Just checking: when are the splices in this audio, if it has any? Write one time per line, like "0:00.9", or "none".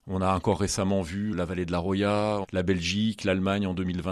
0:01.3
0:02.4